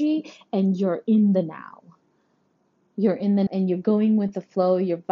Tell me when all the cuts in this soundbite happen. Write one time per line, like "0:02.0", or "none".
0:03.5

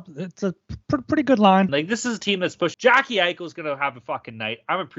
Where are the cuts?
0:01.7
0:02.7

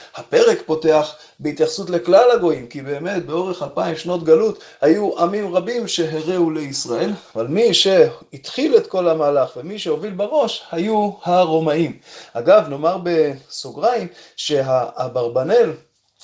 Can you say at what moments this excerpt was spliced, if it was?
none

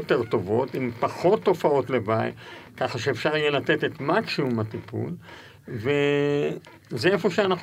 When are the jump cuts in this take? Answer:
none

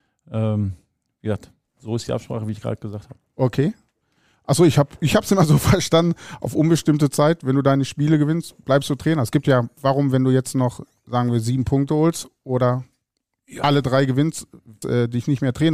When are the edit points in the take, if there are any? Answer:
0:14.8

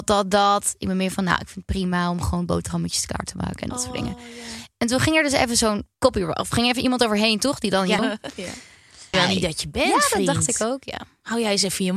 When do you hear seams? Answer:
0:05.9
0:08.0
0:09.1

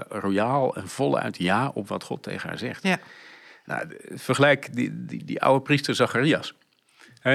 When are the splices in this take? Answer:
none

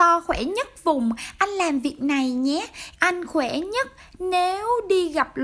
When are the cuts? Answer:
0:03.0

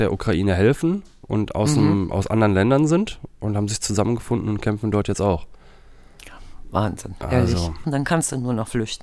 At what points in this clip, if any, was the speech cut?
0:07.8

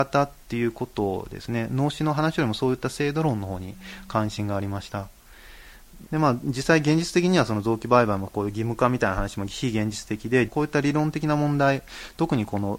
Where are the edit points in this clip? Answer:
0:06.1
0:10.5

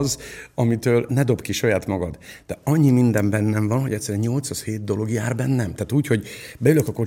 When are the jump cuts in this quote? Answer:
0:01.1

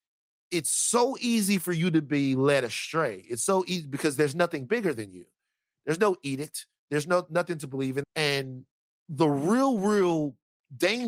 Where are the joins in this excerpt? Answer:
0:08.0

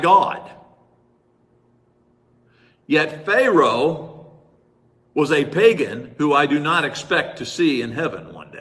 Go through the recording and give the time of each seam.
none

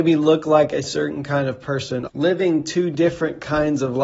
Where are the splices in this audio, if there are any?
0:02.1

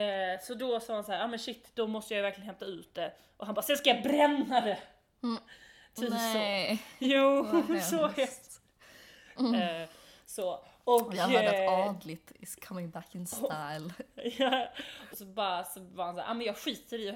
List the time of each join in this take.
0:09.4
0:15.1

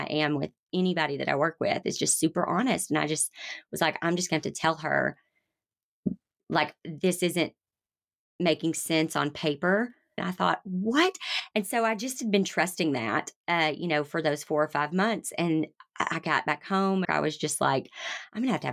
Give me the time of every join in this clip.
0:10.2
0:11.5
0:17.0

